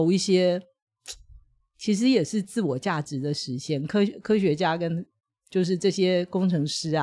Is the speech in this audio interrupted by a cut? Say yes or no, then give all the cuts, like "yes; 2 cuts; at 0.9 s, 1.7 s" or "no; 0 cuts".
no; 0 cuts